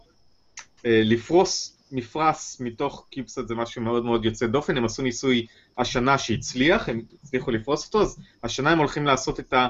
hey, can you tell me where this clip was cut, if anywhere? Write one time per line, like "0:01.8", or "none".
none